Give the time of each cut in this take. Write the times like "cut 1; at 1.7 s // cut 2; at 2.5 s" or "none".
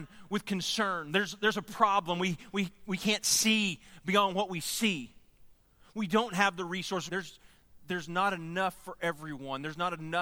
cut 1; at 7.1 s